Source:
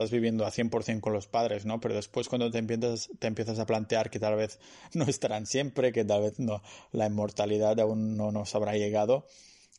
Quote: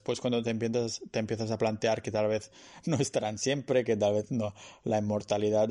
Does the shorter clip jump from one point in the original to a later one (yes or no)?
no